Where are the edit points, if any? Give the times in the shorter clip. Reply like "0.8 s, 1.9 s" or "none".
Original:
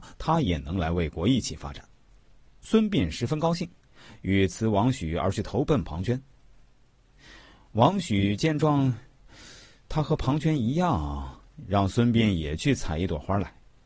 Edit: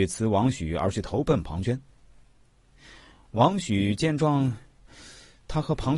none